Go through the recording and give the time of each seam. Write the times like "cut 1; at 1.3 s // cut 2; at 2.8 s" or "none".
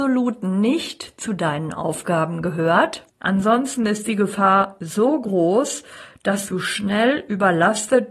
cut 1; at 3.1 s